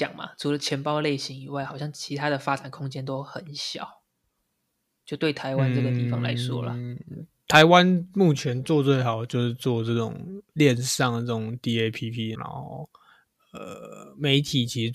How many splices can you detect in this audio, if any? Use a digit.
2